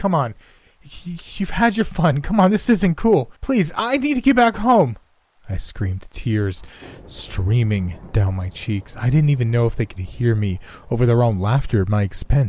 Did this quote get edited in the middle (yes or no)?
yes